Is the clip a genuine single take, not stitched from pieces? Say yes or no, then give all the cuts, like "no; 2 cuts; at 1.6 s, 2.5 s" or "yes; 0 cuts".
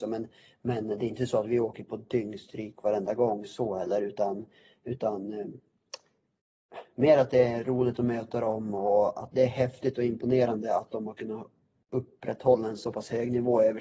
no; 1 cut; at 9.3 s